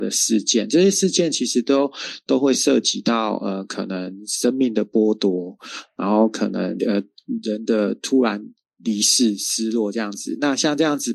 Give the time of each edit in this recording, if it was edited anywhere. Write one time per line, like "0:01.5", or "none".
0:06.8